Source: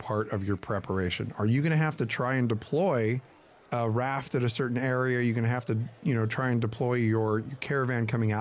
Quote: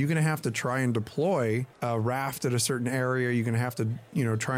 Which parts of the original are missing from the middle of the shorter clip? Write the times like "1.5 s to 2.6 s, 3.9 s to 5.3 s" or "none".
3.3 s to 3.6 s